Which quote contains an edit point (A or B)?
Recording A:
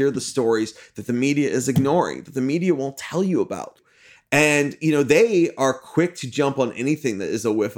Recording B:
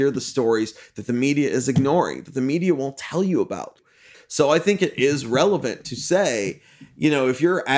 B